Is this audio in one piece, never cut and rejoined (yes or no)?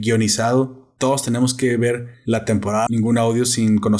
no